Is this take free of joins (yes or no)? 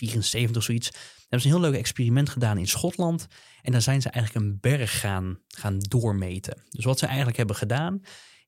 yes